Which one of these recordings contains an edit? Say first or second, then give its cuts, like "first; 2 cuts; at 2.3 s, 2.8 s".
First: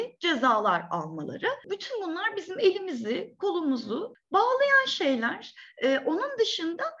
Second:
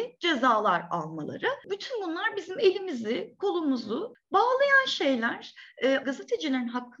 second; 1 cut; at 6.0 s